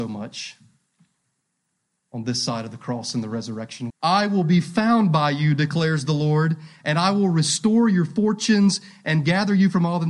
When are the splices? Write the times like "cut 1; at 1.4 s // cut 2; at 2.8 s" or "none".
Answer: cut 1; at 3.9 s